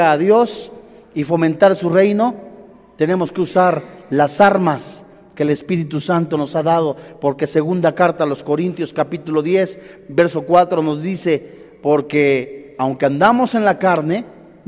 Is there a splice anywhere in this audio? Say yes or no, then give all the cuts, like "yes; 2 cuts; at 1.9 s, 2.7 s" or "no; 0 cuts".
no; 0 cuts